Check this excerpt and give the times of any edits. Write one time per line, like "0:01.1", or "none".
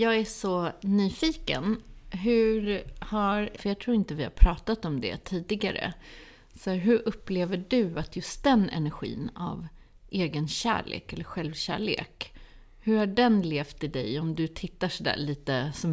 0:03.6